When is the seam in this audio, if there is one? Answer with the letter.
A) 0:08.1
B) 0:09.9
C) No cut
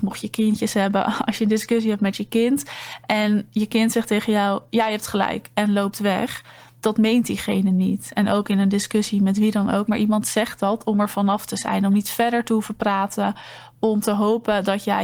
B